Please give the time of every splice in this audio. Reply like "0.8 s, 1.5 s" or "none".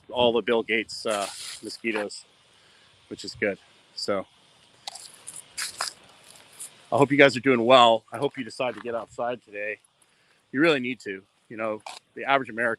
none